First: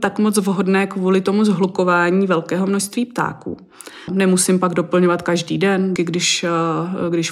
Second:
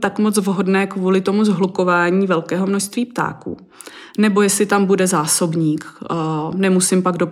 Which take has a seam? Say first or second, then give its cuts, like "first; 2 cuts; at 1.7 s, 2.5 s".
first; 2 cuts; at 4.1 s, 6.0 s